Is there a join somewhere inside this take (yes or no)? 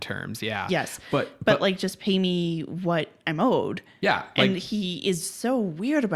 no